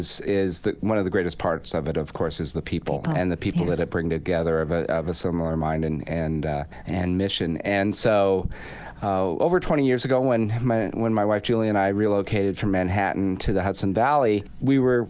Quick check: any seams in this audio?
no; 0 cuts

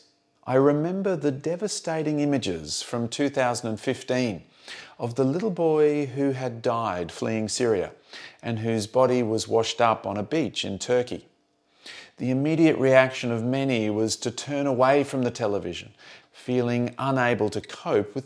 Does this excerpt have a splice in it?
yes; 1 cut; at 16.2 s

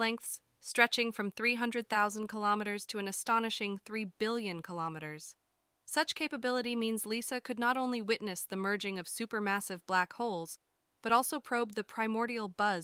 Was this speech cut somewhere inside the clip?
no; 0 cuts

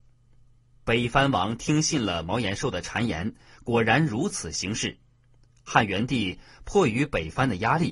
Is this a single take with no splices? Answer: yes; 0 cuts

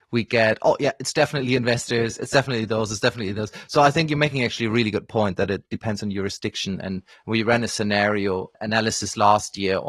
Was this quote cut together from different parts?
no; 0 cuts

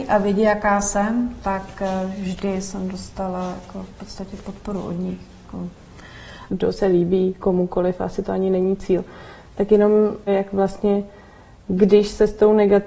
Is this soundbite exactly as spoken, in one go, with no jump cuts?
no; 2 cuts; at 6.5 s, 10.3 s

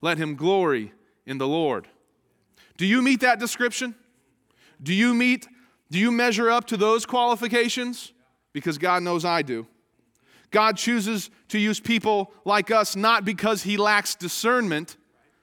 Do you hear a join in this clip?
no; 0 cuts

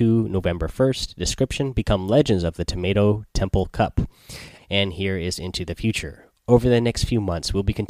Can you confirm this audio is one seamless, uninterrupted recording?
no; 1 cut; at 4.6 s

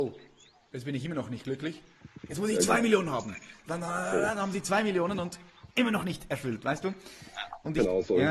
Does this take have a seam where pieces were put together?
yes; 1 cut; at 5.7 s

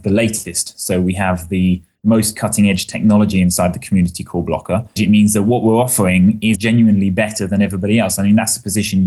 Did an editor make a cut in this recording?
yes; 2 cuts; at 5.0 s, 6.5 s

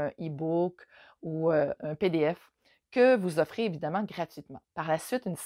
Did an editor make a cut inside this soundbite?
yes; 1 cut; at 1.8 s

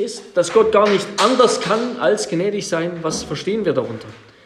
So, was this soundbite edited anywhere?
no; 0 cuts

